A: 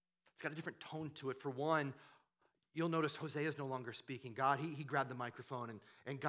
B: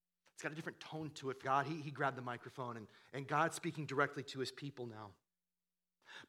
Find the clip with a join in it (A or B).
B